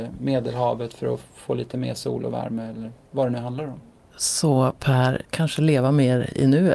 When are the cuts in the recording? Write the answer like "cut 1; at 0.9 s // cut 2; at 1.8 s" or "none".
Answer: cut 1; at 5.2 s